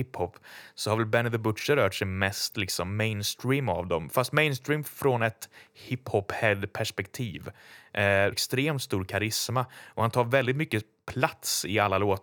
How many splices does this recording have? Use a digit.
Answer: 1